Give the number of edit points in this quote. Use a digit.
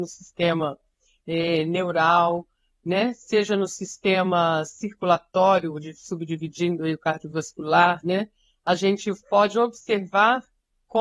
0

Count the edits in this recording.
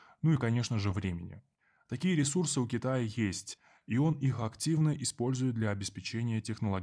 0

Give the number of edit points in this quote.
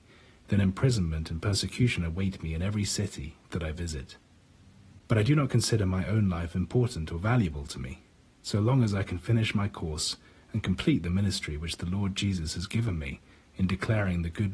0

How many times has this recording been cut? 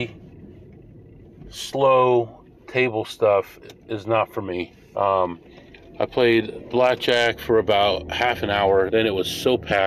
2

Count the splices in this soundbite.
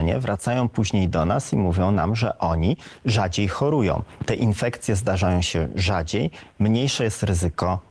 0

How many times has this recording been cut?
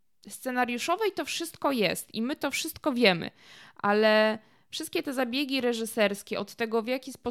0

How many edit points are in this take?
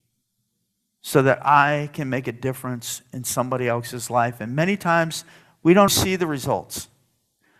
1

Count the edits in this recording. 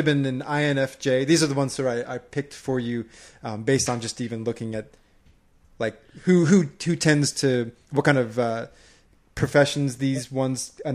0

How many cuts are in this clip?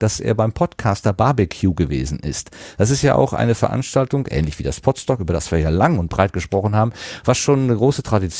0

